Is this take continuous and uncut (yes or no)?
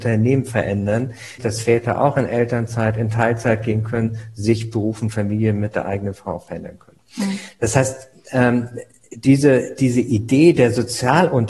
no